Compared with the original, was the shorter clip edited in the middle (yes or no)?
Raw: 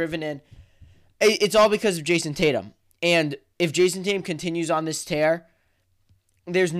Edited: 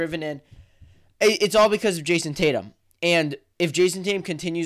no